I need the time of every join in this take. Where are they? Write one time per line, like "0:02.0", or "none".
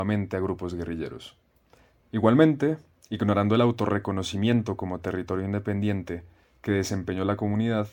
0:02.0